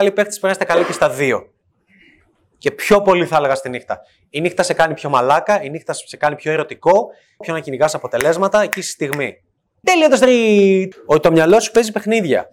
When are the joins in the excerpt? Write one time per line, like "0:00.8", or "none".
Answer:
0:07.4
0:09.8
0:10.9